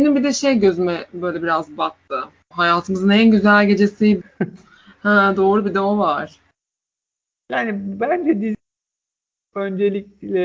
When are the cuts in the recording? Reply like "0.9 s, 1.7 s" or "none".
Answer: 2.5 s, 4.2 s